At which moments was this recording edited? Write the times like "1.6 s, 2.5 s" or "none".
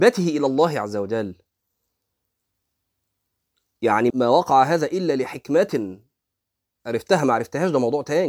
4.1 s